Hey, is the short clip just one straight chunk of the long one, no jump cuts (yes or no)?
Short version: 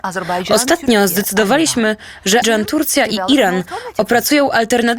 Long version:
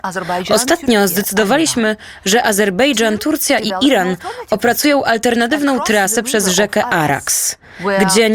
no